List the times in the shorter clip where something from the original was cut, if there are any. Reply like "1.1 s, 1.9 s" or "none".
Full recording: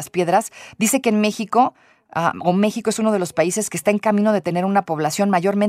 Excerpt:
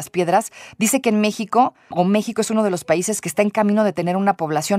1.9 s